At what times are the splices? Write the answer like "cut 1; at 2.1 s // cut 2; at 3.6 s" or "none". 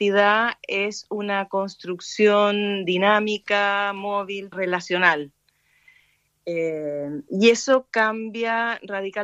cut 1; at 4.5 s